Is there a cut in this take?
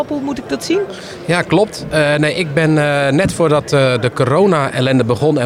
no; 0 cuts

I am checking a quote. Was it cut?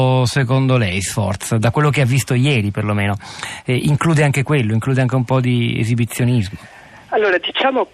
no; 0 cuts

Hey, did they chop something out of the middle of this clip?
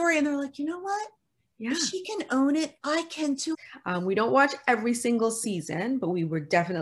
yes; 1 cut; at 3.5 s

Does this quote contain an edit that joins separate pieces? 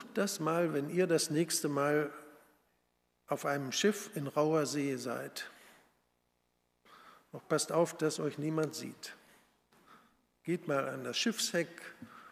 no; 0 cuts

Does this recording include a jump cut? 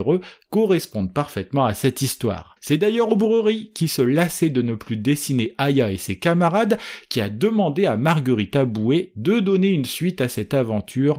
yes; 1 cut; at 2.6 s

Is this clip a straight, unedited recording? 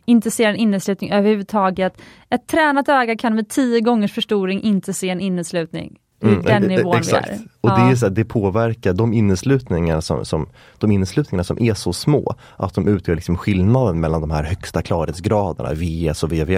yes; 0 cuts

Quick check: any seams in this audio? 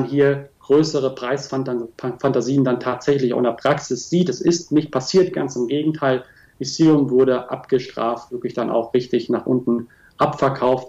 no; 0 cuts

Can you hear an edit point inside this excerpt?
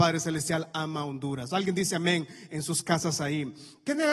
no; 0 cuts

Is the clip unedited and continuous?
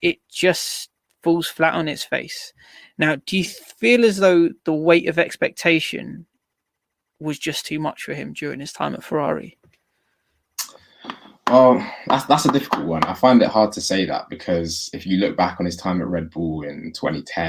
yes; 0 cuts

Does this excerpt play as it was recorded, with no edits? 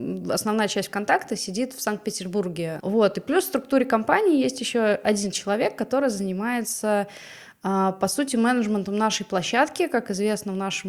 no; 1 cut; at 2.8 s

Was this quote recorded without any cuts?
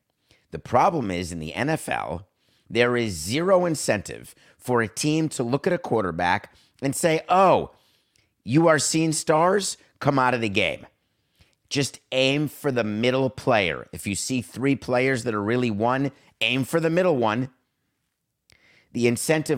yes; 0 cuts

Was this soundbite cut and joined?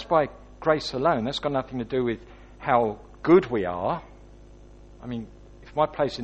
no; 0 cuts

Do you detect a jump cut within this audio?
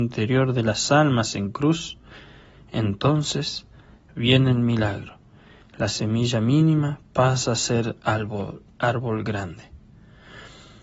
no; 0 cuts

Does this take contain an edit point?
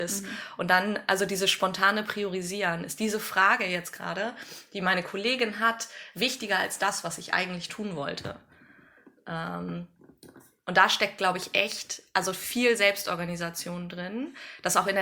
no; 0 cuts

